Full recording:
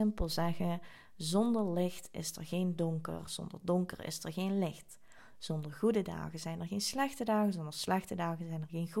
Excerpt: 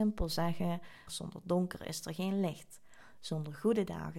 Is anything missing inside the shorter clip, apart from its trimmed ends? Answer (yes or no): yes